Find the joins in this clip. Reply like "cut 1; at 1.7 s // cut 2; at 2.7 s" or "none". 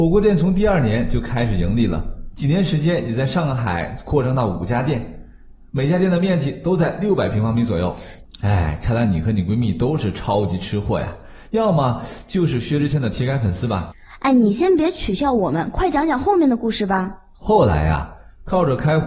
cut 1; at 8.2 s